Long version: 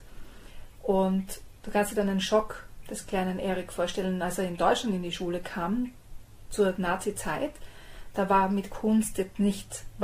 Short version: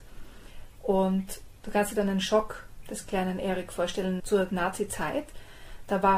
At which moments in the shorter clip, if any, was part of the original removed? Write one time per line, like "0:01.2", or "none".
0:04.2